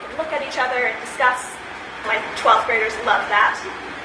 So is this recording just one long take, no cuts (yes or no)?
no